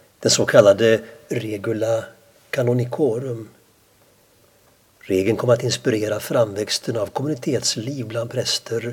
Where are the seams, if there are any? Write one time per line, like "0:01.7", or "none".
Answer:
none